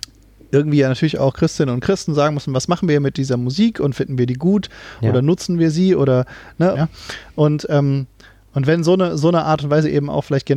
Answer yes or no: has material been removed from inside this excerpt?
yes